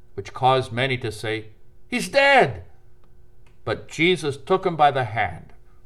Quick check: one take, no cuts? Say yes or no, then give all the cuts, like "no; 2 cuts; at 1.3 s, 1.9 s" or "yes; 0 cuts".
yes; 0 cuts